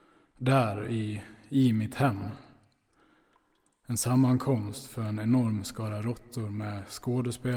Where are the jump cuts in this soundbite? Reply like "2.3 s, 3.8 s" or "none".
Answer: none